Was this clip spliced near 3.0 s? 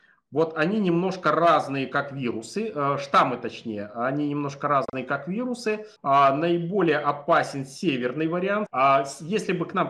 no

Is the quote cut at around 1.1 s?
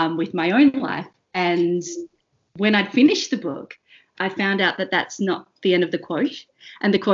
no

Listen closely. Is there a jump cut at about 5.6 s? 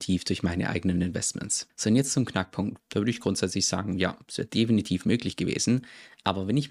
no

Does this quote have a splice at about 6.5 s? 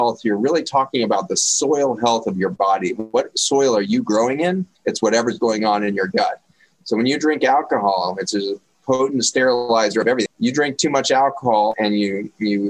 no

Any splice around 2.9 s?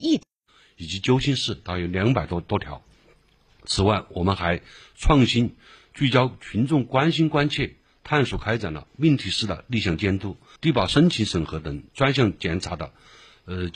no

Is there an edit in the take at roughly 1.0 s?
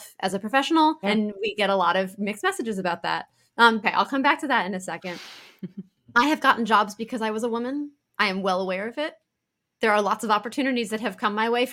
yes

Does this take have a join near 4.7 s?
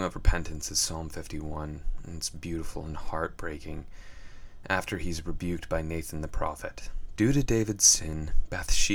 no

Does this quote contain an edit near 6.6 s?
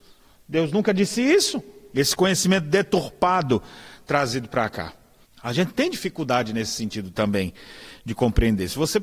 no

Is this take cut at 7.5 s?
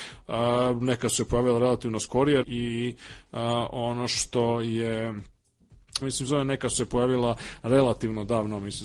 no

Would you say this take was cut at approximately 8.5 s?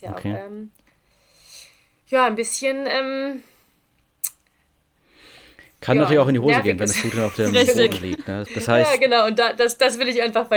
yes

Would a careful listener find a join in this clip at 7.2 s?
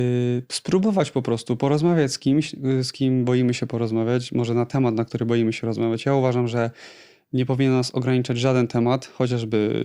no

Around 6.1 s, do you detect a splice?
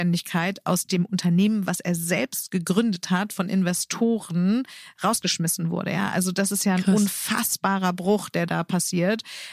no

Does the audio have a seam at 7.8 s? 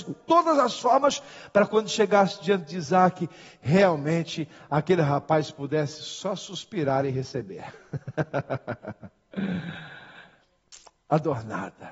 no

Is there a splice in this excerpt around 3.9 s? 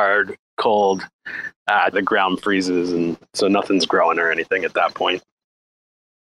no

